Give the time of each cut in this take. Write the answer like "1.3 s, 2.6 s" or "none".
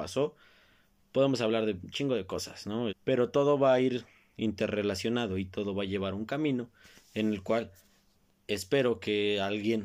2.9 s